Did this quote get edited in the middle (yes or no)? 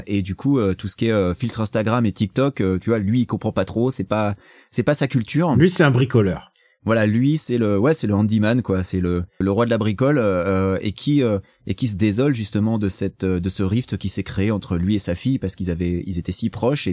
yes